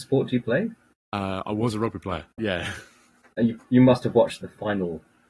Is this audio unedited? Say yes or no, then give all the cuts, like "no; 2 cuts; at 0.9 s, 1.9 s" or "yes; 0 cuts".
no; 2 cuts; at 2.4 s, 4.4 s